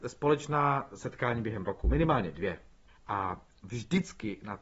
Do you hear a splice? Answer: yes; 1 cut; at 2.9 s

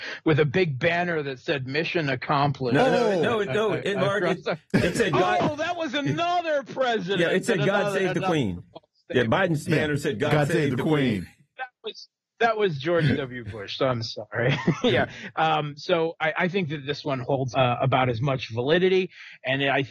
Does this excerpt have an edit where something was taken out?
yes; 2 cuts; at 9.7 s, 17.5 s

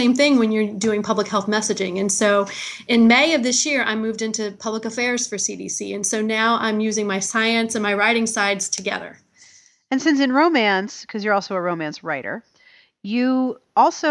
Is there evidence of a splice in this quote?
no; 0 cuts

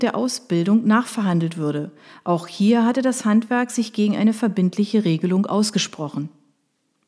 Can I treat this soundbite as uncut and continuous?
yes; 0 cuts

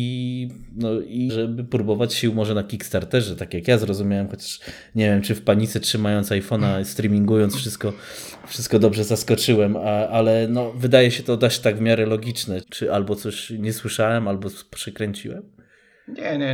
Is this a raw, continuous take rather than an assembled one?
no; 2 cuts; at 1.3 s, 12.6 s

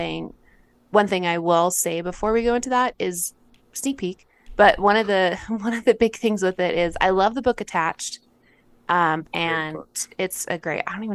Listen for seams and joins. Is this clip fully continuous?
no; 2 cuts; at 3.6 s, 9.2 s

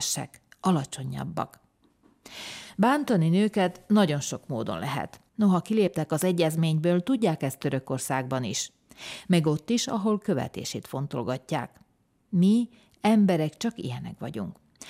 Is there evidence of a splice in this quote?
yes; 1 cut; at 5.3 s

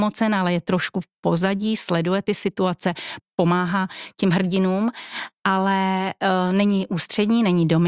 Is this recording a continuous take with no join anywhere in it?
yes; 0 cuts

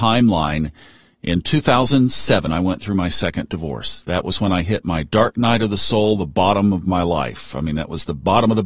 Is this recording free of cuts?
no; 1 cut; at 2.5 s

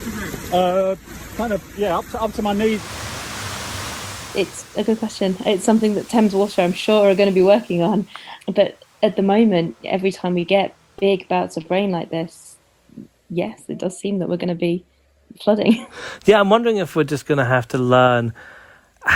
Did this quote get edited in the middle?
no; 0 cuts

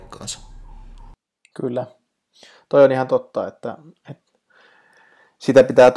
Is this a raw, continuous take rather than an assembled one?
yes; 0 cuts

